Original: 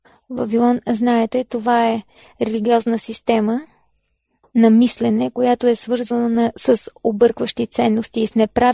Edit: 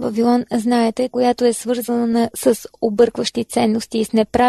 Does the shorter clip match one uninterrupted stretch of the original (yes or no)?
no